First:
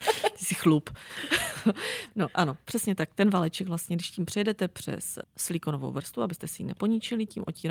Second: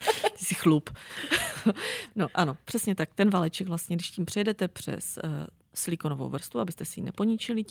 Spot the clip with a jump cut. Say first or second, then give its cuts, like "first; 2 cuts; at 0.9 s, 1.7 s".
first; 1 cut; at 5.2 s